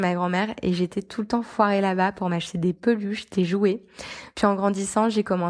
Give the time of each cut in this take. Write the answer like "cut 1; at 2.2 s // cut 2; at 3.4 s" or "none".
none